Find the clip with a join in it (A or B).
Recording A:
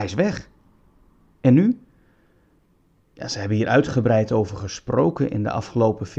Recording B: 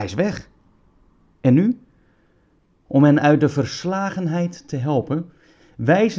B